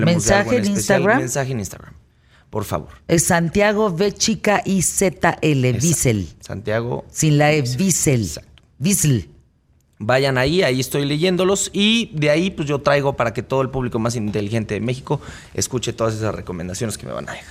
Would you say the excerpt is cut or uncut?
uncut